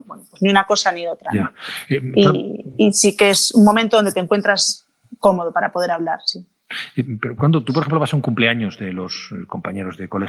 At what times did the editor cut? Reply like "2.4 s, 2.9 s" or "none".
none